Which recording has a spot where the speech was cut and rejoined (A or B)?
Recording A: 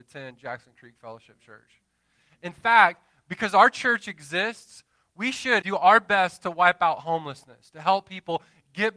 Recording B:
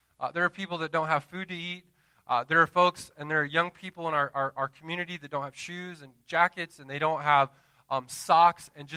A